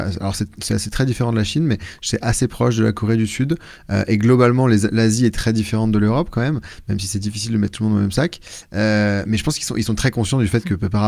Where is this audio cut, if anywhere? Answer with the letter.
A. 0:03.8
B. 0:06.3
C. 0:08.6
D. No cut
D